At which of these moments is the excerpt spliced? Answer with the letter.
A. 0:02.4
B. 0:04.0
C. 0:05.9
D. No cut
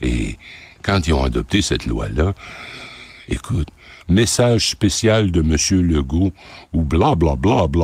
B